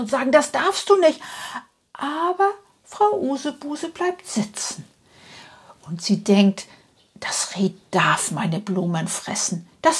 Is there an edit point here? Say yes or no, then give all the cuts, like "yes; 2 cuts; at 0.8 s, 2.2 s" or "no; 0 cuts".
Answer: no; 0 cuts